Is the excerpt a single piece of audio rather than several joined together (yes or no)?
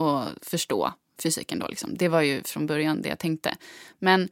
yes